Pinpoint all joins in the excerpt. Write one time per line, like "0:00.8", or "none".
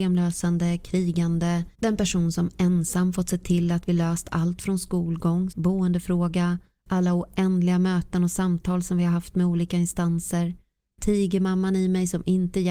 0:05.5